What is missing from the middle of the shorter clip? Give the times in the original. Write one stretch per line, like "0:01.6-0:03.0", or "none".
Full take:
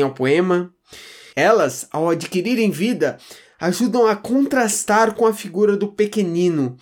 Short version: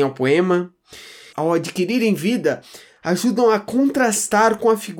0:01.3-0:01.9